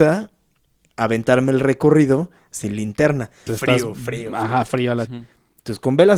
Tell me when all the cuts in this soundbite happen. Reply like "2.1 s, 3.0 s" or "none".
3.5 s, 5.1 s